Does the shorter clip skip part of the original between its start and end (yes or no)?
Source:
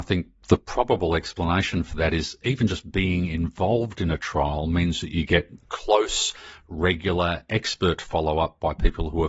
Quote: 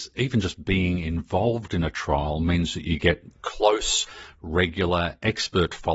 no